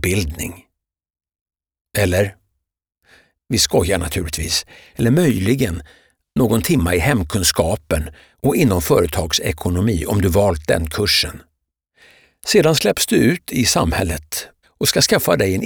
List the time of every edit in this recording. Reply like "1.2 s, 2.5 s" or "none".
4.9 s, 14.6 s